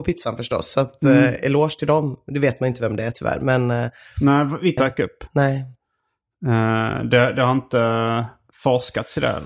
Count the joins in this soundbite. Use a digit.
1